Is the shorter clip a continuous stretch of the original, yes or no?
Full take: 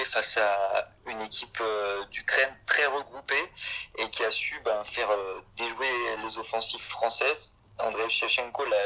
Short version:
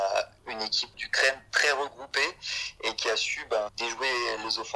no